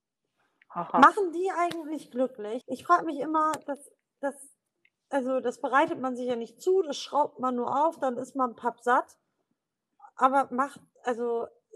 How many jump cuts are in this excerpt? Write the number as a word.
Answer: one